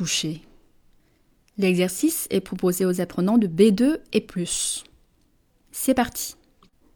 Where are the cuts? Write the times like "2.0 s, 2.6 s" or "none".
none